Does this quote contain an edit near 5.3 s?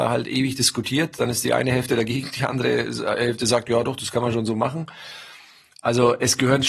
no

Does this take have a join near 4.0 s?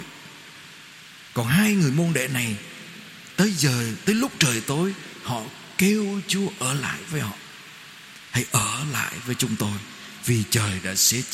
yes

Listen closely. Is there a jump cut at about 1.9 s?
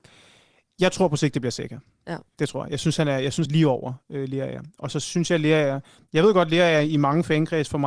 no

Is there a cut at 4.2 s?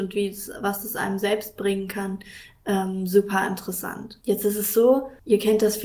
no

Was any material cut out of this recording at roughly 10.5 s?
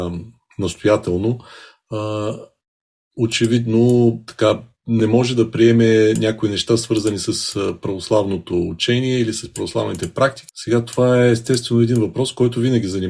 yes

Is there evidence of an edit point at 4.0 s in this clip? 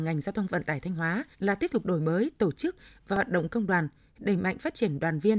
no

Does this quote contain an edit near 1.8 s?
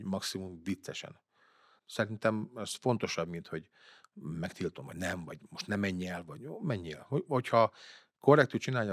yes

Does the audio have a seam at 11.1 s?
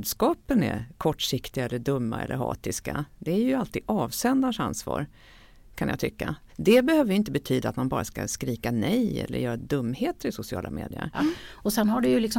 yes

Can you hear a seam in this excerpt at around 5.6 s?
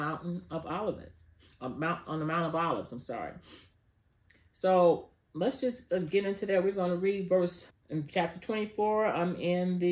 no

